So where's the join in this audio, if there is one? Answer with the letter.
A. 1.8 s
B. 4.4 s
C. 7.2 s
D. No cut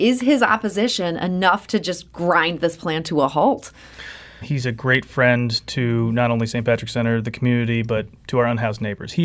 B